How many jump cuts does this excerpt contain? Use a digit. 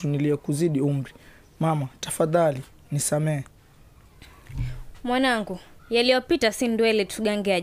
1